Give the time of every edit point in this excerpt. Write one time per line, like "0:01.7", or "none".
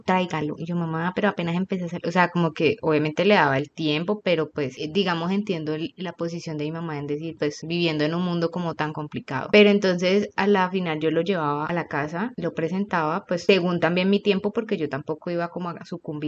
0:07.4